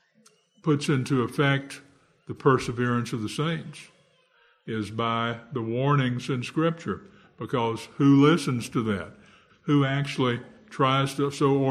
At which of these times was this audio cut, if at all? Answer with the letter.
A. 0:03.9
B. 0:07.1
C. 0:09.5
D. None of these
C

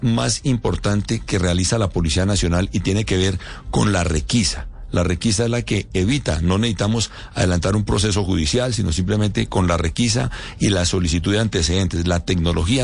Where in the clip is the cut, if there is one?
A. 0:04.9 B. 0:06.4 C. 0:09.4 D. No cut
D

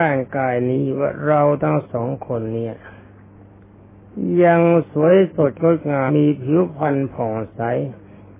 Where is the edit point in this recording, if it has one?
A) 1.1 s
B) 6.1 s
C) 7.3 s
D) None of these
B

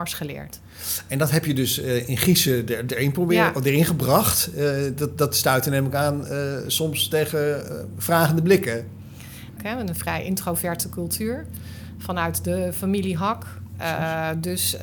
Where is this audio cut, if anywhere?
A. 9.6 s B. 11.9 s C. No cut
A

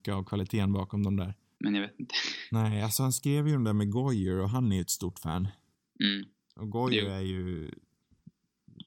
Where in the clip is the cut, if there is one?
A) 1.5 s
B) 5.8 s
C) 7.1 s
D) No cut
A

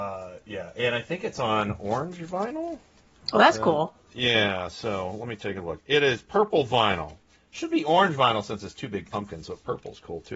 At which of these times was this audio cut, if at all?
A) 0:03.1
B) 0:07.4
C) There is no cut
A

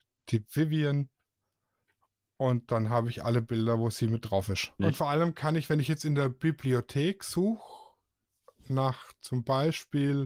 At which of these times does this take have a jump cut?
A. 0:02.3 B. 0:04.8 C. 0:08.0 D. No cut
B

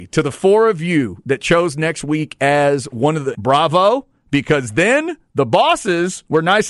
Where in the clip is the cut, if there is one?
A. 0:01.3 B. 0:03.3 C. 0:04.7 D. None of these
B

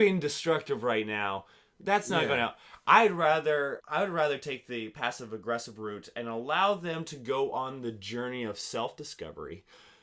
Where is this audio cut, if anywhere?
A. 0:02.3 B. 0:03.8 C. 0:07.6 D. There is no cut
B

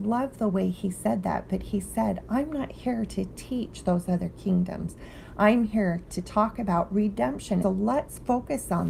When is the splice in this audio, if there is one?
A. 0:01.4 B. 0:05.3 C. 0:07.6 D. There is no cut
C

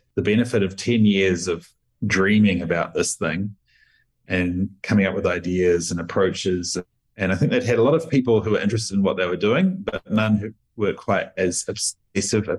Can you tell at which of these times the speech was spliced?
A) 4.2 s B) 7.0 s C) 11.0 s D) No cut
B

